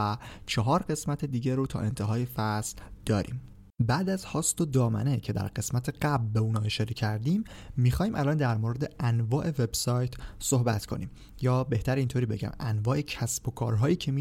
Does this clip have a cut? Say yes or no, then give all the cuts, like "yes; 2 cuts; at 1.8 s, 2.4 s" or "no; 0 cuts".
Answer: yes; 1 cut; at 3.7 s